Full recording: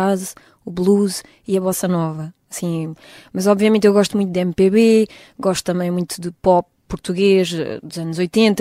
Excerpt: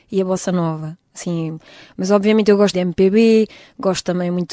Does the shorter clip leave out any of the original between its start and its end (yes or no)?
yes